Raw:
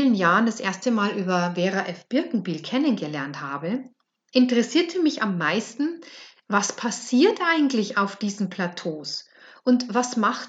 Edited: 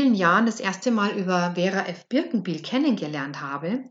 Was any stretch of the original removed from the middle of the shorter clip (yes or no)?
no